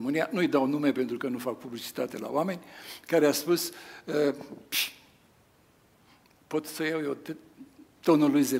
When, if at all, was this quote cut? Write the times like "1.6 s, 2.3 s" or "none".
none